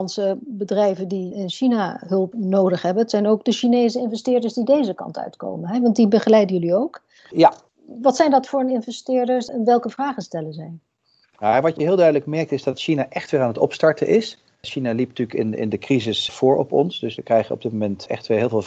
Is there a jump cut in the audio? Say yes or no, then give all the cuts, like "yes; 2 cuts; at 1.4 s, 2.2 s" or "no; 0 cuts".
no; 0 cuts